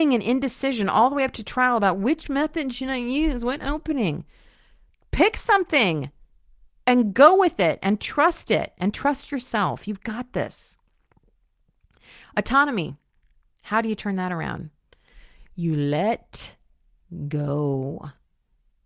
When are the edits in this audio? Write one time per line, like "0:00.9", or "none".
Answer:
none

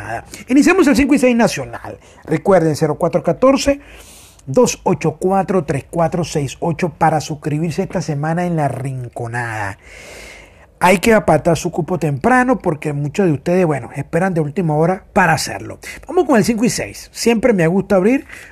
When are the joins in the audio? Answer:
0:15.1

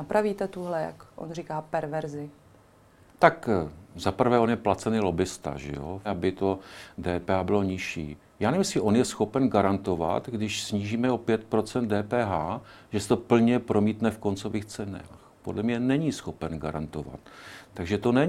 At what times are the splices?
0:06.0

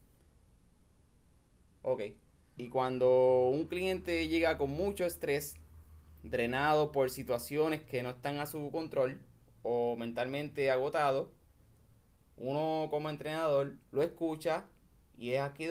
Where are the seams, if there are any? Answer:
0:02.6
0:13.8

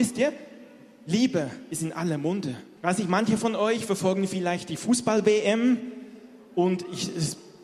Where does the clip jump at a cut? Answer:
0:02.8

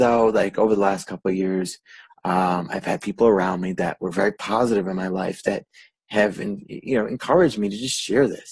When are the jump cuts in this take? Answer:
none

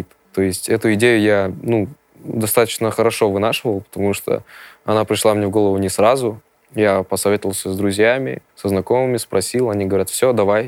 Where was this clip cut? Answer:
0:08.5

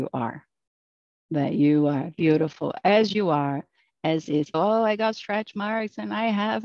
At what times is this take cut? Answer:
0:04.5

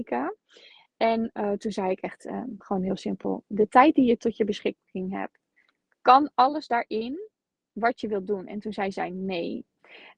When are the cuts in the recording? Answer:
none

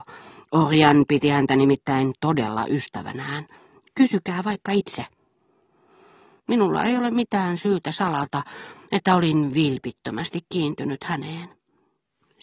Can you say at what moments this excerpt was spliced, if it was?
0:06.4

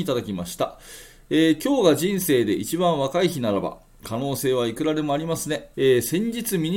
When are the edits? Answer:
0:05.7

